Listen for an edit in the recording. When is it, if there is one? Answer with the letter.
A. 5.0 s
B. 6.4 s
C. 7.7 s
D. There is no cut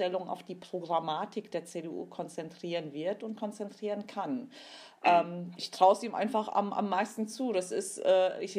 D